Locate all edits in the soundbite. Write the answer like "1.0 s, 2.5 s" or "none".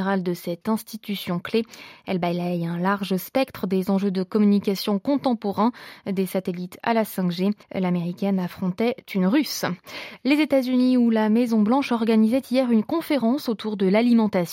7.6 s